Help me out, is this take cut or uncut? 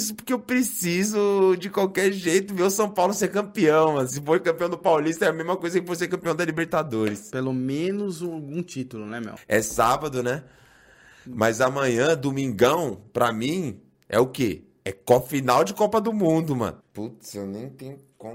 cut